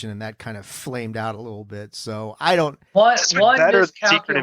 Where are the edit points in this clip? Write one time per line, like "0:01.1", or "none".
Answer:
0:02.9